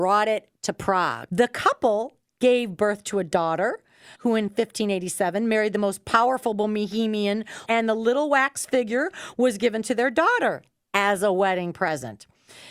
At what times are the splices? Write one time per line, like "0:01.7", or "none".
0:01.3
0:04.1
0:07.6

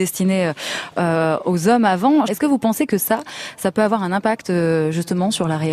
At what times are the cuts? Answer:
0:02.3

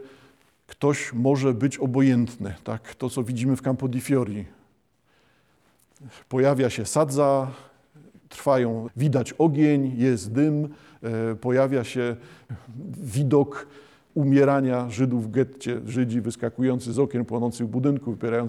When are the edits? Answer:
0:08.9
0:14.1

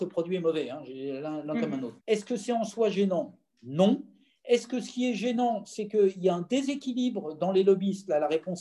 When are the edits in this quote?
0:02.0

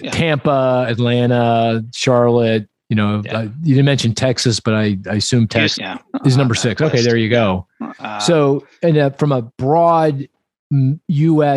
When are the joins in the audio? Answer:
0:05.7

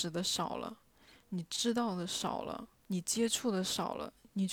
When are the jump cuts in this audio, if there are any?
0:02.8

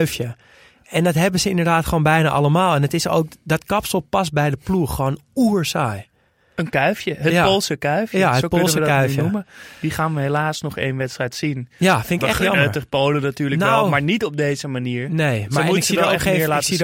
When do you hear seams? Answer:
none

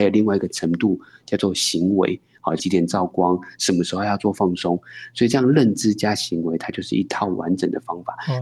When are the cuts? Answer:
0:02.6

